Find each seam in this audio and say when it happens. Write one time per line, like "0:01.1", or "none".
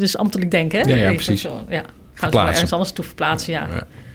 none